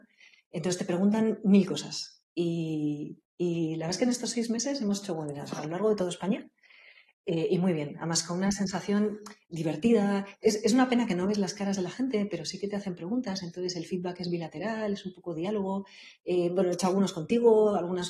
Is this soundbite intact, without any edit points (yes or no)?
yes